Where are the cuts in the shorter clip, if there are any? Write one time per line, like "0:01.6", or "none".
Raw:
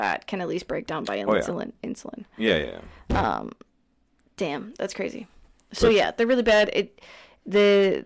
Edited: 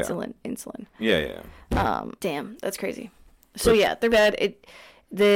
0:02.2
0:04.1